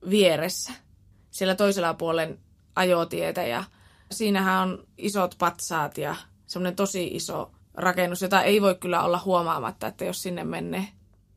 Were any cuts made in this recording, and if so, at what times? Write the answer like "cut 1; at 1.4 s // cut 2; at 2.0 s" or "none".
none